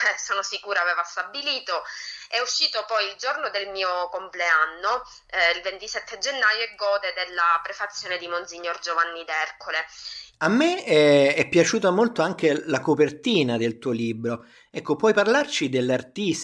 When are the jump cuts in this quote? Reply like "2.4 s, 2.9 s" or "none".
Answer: 10.3 s